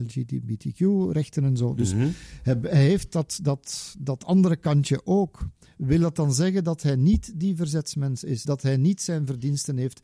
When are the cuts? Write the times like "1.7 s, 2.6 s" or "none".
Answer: none